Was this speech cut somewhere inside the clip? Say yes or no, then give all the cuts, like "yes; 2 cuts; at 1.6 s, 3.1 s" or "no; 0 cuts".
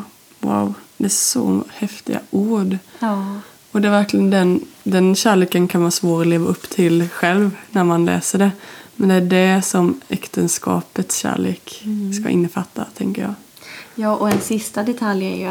no; 0 cuts